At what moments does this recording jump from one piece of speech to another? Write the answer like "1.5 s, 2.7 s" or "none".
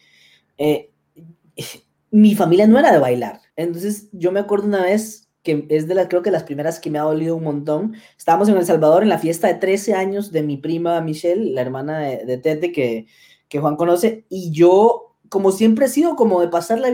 3.5 s